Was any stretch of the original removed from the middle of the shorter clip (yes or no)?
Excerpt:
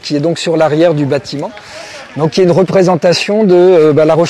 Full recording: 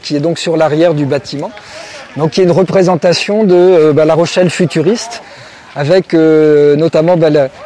no